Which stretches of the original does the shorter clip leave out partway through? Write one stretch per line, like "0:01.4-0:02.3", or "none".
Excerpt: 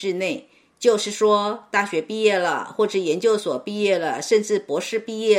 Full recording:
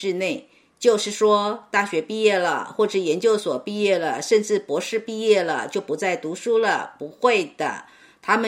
none